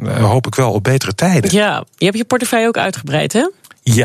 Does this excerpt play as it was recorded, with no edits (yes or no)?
yes